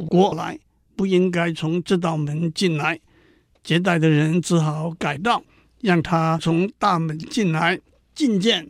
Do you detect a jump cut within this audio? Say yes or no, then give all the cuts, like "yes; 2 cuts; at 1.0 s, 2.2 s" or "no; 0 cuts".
no; 0 cuts